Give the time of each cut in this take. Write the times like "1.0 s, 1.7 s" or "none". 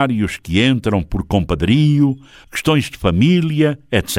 2.4 s